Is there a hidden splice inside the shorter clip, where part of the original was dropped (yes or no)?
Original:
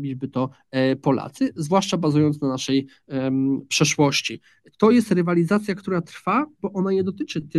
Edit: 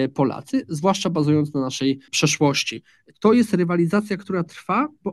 yes